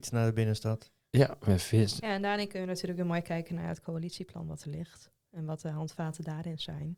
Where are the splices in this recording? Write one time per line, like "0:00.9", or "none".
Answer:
0:02.0